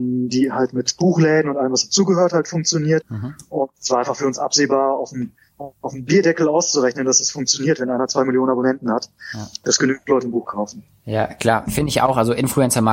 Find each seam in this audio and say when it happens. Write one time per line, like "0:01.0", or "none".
0:03.0
0:11.7